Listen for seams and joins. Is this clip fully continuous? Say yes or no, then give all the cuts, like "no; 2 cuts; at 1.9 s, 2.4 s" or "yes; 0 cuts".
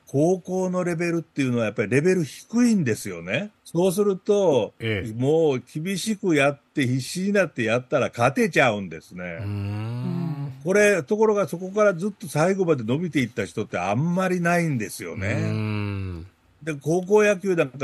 no; 1 cut; at 3.5 s